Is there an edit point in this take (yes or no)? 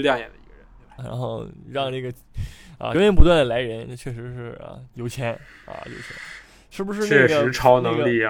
yes